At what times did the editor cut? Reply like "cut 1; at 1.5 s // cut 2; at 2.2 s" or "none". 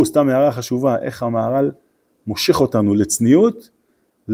none